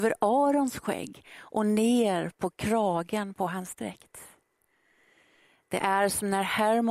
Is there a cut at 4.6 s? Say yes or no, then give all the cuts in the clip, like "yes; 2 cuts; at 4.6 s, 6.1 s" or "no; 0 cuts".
no; 0 cuts